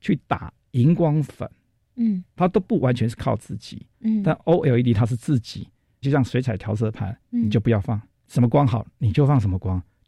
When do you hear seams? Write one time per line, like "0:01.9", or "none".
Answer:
0:03.9
0:06.0
0:07.2